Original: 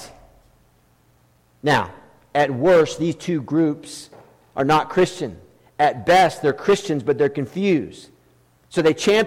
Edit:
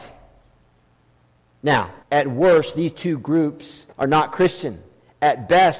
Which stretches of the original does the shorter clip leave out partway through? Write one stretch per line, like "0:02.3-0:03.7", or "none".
0:02.0-0:02.3
0:04.2-0:04.5